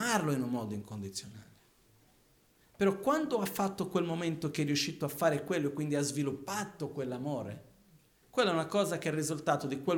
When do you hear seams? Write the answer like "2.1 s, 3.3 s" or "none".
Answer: none